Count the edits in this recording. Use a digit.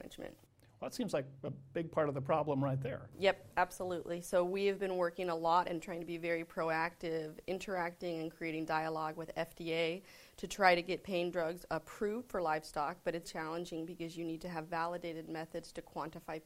1